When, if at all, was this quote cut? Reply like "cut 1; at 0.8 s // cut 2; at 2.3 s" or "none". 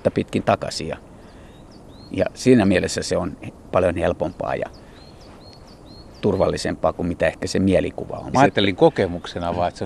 cut 1; at 8.3 s